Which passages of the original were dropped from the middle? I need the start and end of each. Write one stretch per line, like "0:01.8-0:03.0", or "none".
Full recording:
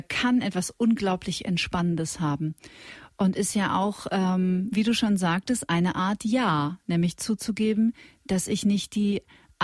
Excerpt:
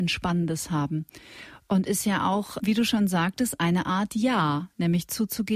0:04.1-0:04.7